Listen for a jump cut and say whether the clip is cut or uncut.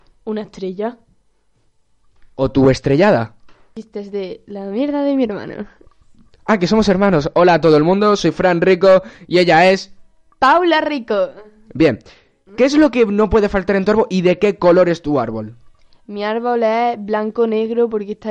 uncut